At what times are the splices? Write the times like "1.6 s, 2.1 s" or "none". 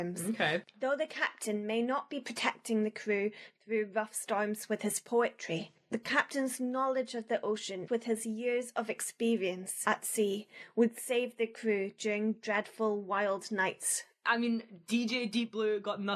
none